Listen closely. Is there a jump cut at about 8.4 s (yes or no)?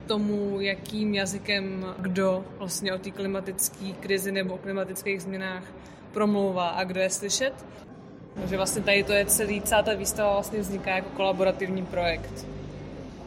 yes